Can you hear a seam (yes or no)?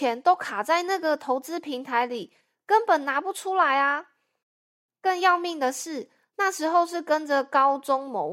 no